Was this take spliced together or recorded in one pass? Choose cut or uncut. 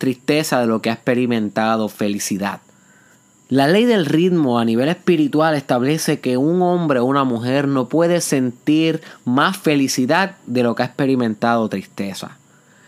cut